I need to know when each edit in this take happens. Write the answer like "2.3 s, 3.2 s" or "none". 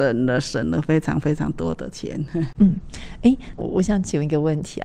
2.5 s, 3.6 s